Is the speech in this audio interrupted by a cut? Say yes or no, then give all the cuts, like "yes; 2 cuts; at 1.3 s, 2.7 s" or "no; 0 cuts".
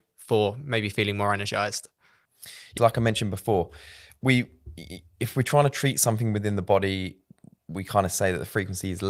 yes; 1 cut; at 2.8 s